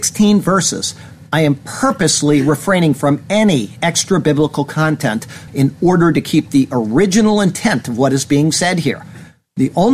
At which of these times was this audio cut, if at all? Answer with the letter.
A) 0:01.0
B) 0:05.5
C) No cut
B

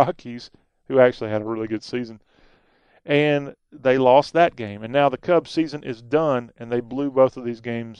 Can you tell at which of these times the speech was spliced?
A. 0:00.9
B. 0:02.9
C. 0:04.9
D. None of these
D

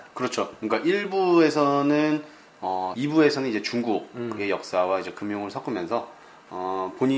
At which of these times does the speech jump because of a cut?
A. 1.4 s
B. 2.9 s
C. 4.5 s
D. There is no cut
B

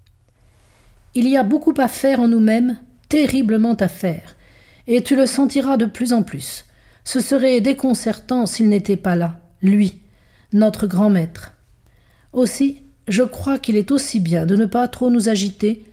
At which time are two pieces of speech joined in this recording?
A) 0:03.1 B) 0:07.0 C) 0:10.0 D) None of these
D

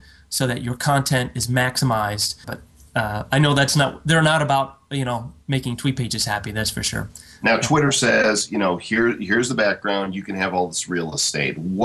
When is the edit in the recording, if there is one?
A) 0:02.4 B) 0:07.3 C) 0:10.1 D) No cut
A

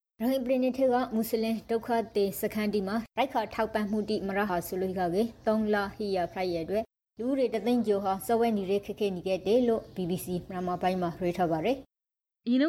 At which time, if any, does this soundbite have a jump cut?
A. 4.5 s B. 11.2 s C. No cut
A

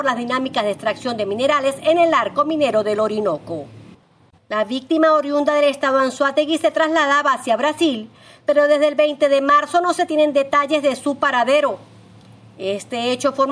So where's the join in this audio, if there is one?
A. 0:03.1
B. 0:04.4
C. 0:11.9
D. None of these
B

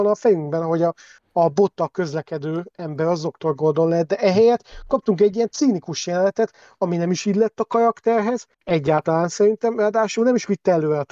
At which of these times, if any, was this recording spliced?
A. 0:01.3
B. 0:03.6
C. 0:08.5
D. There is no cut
C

